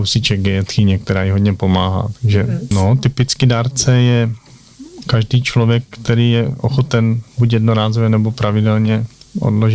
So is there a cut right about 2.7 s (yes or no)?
yes